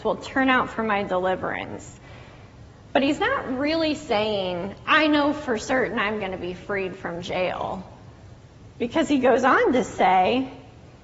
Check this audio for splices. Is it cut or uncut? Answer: uncut